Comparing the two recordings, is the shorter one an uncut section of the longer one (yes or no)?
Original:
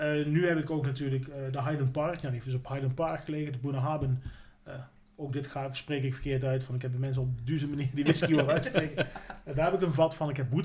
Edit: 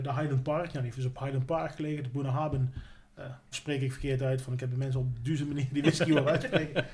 no